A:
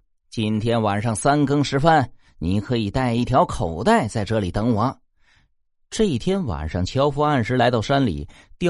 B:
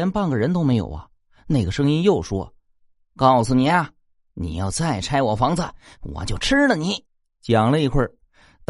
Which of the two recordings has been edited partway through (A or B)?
B